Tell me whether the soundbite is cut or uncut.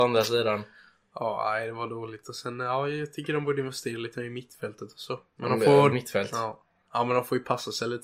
cut